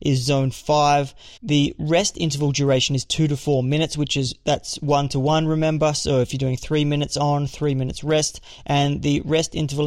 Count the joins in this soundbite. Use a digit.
1